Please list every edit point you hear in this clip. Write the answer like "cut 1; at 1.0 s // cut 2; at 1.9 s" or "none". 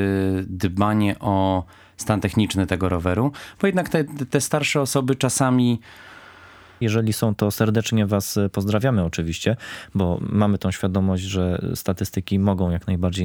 cut 1; at 6.8 s

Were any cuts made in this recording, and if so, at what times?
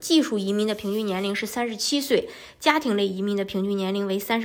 none

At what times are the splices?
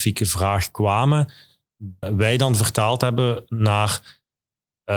cut 1; at 2.0 s

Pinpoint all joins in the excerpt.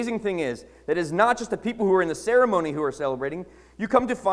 none

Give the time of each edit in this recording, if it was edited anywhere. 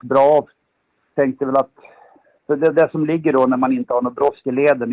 none

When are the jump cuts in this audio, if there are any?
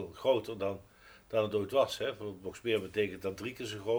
none

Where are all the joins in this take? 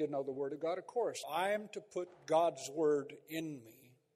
cut 1; at 1.2 s

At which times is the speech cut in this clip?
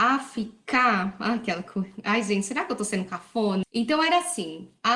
cut 1; at 3.6 s

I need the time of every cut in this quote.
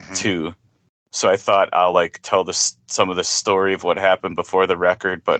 none

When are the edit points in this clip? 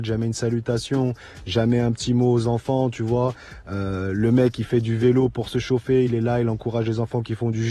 none

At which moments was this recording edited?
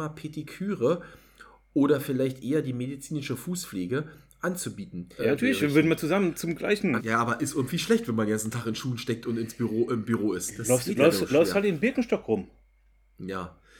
cut 1; at 5.2 s // cut 2; at 7.0 s

